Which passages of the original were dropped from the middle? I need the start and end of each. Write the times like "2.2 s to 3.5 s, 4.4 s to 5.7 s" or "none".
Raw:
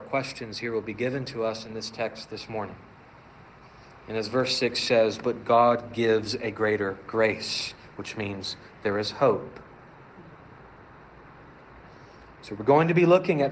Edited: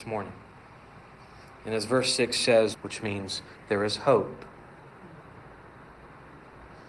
5.2 s to 7.9 s